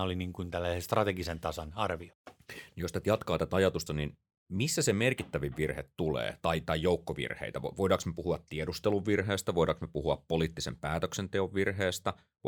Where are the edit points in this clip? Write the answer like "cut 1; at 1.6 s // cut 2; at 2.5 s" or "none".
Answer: cut 1; at 3.9 s